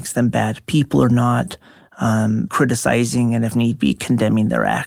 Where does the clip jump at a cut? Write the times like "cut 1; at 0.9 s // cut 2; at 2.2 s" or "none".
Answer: cut 1; at 2.5 s